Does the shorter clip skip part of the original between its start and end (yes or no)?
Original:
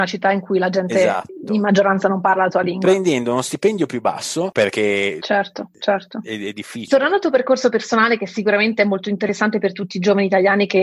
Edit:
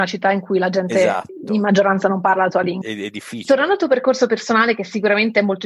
yes